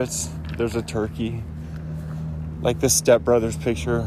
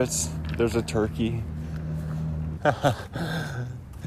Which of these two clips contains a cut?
second; 1 cut; at 2.6 s

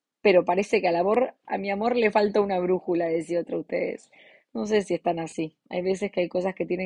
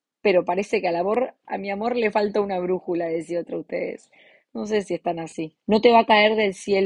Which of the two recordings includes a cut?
second; 1 cut; at 5.6 s

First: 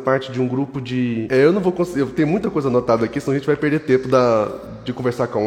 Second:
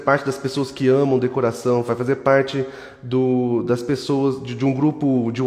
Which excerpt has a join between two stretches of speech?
first; 1 cut; at 1.3 s

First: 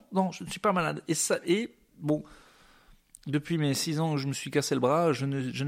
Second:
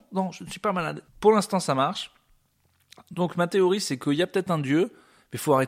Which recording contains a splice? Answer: second; 1 cut; at 1.1 s

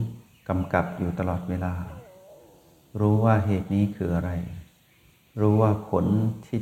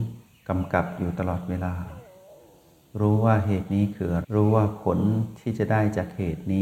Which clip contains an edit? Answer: second; 1 cut; at 4.2 s

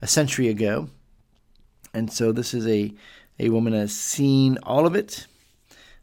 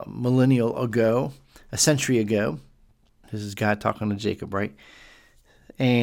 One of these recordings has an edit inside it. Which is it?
second; 1 cut; at 3.2 s

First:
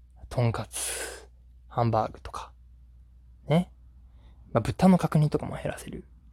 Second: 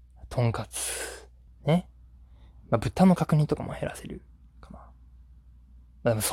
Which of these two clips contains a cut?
second; 1 cut; at 1.5 s

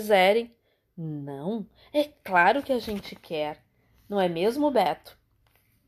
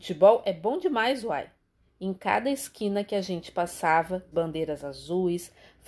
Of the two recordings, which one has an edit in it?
second; 2 cuts; at 1.9 s, 4.3 s

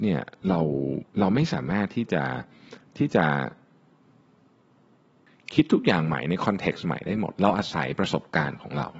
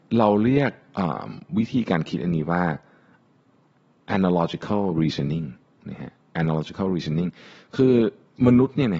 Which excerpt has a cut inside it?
first; 1 cut; at 1.1 s

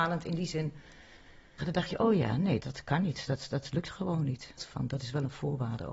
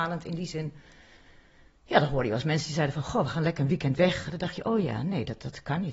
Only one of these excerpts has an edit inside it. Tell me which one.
first; 3 cuts; at 1.6 s, 2.6 s, 4.6 s

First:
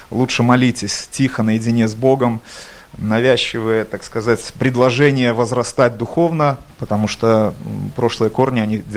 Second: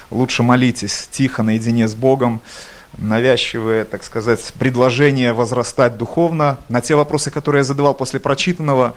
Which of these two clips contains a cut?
first; 1 cut; at 6.7 s

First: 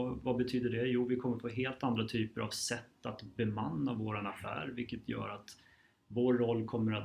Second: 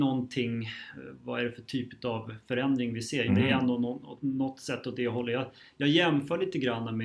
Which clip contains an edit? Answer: second; 1 cut; at 3.3 s

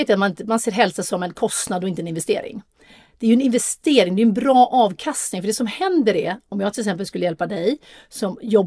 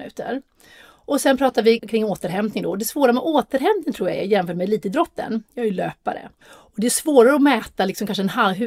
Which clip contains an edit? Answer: second; 2 cuts; at 1.8 s, 6.4 s

